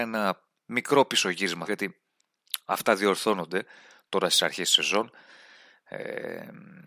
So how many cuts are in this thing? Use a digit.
1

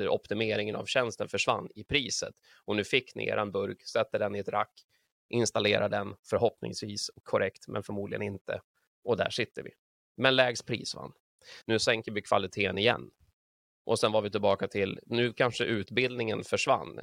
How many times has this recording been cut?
1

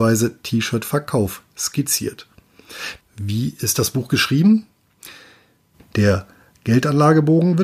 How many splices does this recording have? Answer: 2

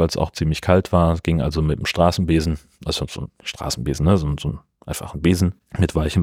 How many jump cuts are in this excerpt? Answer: 0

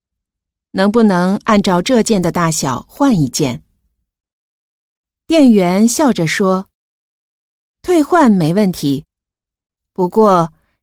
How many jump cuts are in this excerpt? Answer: 0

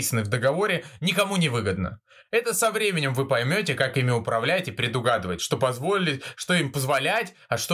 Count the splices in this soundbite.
0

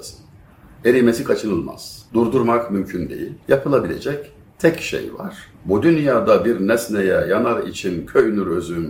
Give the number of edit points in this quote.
2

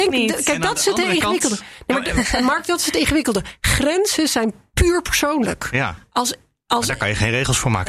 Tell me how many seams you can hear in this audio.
0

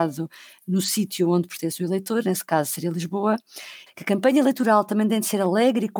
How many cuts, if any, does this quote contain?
1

